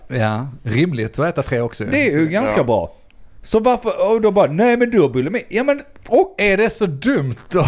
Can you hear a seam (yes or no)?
no